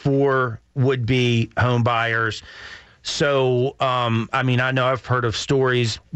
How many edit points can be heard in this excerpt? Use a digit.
1